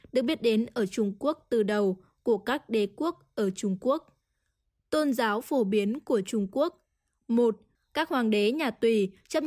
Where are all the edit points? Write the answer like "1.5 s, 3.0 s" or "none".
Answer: 7.7 s